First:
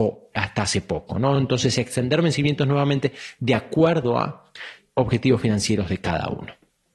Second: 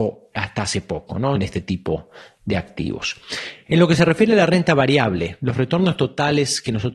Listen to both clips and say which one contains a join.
second; 2 cuts; at 1.4 s, 3.7 s

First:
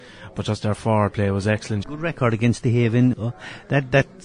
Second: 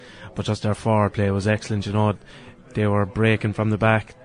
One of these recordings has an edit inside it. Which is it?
first; 2 cuts; at 1.8 s, 3.1 s

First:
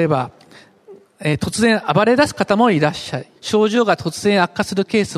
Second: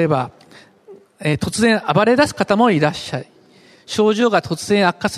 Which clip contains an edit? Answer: first; 1 cut; at 3.4 s

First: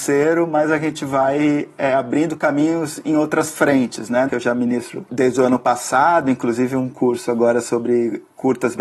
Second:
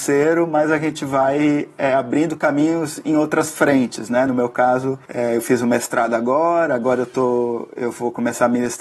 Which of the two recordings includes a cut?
first; 1 cut; at 4.3 s

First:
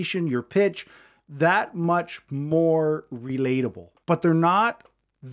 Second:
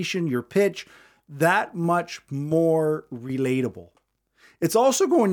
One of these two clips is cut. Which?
first; 1 cut; at 4.0 s

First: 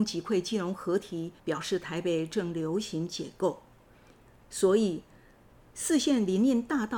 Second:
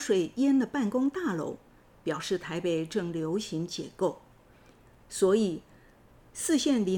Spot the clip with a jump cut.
first; 1 cut; at 1.4 s

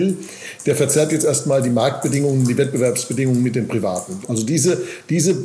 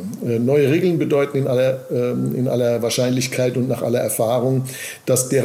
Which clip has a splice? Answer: first; 1 cut; at 4.2 s

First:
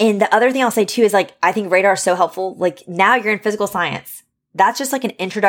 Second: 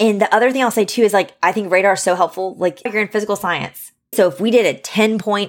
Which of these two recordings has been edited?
second; 2 cuts; at 2.9 s, 4.1 s

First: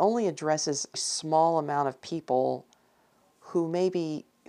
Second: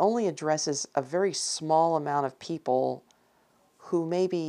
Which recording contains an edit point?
first; 1 cut; at 0.9 s

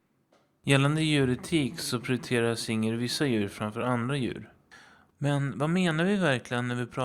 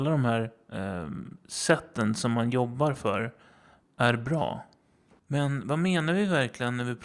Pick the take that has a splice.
first; 1 cut; at 5.1 s

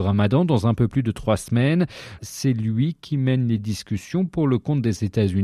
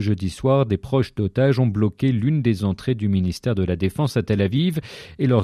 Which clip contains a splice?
first; 1 cut; at 2.2 s

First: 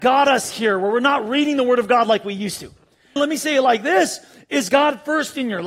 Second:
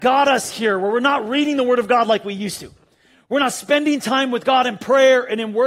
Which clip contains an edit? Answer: first; 1 cut; at 3.2 s

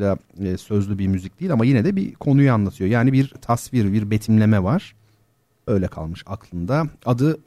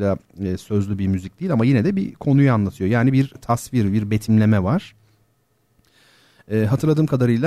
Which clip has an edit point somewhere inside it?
first; 1 cut; at 5.7 s

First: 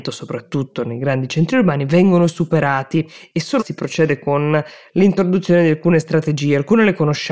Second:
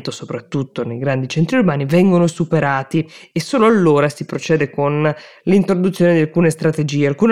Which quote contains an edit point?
first; 1 cut; at 3.6 s

